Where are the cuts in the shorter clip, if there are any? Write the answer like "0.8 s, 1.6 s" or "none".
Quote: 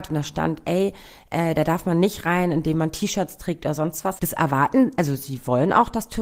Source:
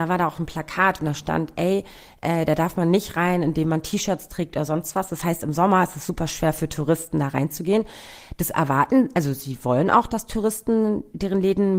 4.2 s